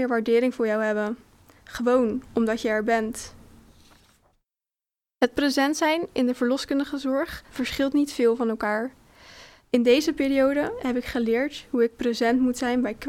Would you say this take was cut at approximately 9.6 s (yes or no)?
yes